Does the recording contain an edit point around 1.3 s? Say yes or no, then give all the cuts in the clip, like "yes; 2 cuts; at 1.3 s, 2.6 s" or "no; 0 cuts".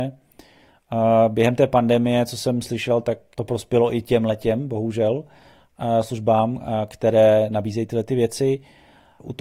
no; 1 cut; at 3.3 s